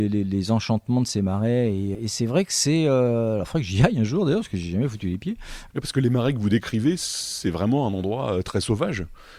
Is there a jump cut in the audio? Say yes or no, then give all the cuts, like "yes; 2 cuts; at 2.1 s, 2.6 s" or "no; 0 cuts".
yes; 2 cuts; at 1.9 s, 5.7 s